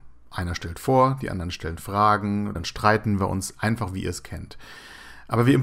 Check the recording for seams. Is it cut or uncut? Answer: cut